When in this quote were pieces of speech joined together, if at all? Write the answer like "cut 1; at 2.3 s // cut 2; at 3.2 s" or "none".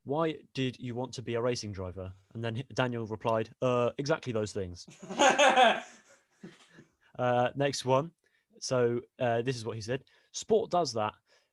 none